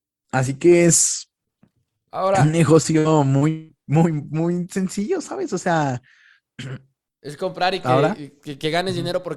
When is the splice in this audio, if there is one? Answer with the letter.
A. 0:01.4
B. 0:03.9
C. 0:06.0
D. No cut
D